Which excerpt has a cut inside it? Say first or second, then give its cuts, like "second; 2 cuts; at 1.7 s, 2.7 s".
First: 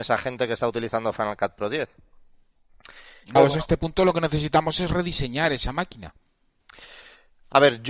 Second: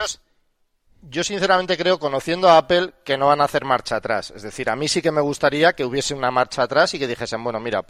first; 1 cut; at 3.4 s